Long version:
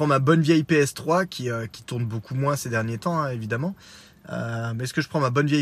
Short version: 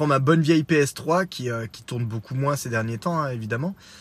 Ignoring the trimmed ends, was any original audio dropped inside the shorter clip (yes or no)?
no